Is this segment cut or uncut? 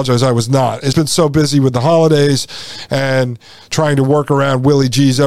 cut